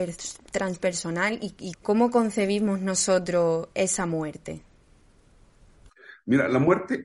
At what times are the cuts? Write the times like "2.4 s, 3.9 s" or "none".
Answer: 1.7 s